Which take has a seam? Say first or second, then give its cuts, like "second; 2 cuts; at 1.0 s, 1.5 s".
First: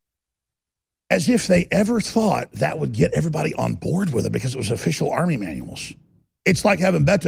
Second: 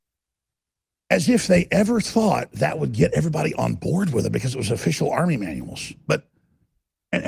second; 1 cut; at 6.0 s